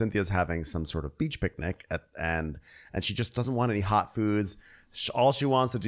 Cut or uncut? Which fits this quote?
uncut